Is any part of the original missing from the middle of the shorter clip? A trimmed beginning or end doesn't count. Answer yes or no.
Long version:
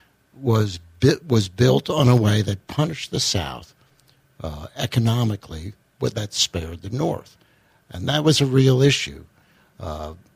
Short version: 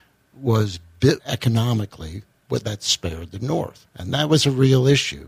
yes